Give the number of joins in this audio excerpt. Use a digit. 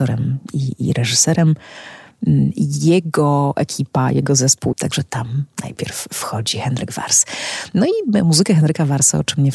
1